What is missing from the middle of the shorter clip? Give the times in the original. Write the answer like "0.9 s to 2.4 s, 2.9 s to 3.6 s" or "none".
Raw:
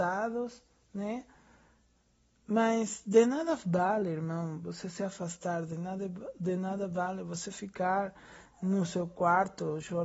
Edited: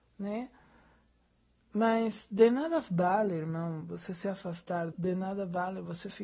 5.7 s to 6.3 s